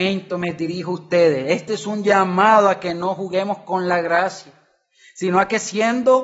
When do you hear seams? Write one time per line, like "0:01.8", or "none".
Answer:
none